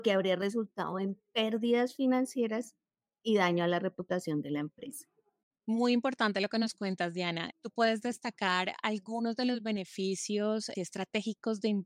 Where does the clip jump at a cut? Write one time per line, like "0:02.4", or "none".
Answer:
0:07.5
0:10.7